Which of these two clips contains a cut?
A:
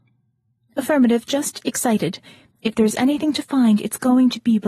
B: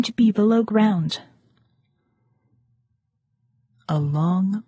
A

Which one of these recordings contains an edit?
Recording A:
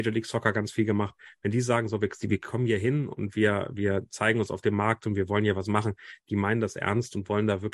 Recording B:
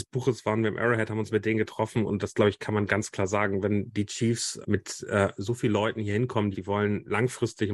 B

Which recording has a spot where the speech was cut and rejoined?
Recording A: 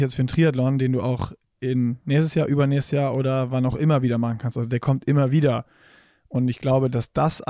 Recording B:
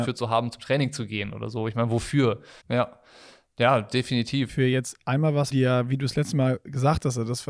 B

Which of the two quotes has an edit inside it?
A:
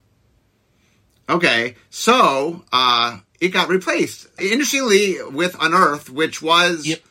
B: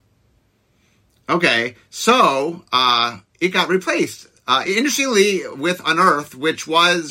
A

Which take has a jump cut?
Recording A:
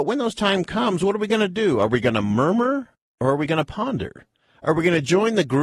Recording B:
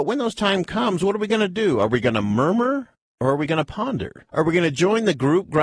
B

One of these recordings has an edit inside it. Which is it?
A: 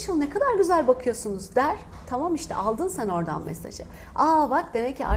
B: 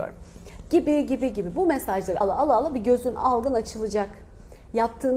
B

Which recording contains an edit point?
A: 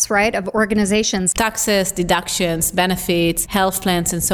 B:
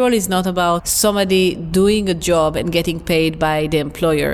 A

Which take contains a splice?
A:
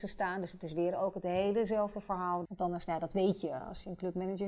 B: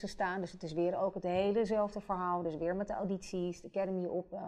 A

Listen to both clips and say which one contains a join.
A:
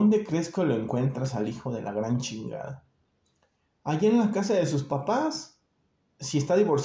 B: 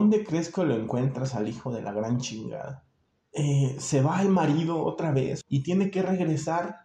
B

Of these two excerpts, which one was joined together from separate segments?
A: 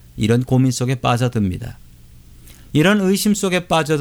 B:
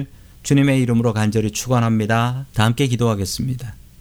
B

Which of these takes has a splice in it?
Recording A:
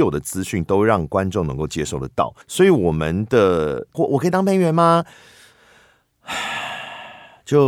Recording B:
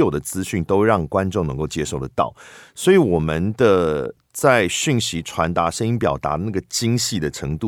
A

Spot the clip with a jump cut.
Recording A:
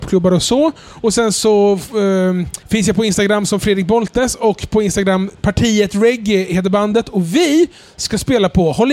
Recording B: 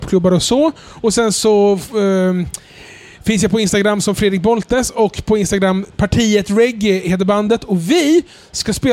A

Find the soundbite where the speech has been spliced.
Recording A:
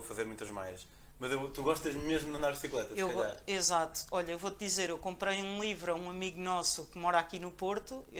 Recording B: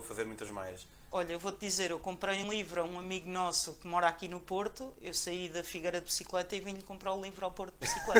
B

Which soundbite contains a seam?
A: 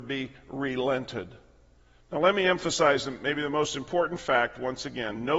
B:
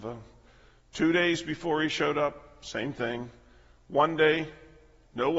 A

